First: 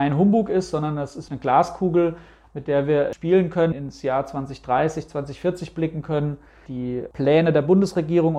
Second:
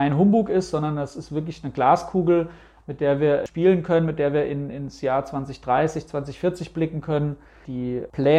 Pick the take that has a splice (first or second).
first